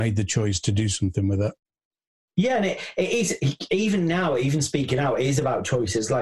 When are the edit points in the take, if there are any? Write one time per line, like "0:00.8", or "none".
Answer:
none